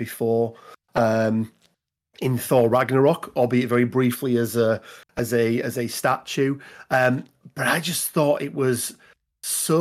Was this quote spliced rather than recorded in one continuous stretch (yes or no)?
no